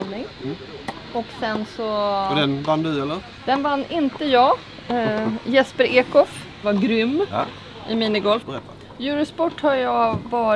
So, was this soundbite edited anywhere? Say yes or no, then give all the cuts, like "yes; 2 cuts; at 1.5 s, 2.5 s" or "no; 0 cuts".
yes; 2 cuts; at 6.6 s, 8.4 s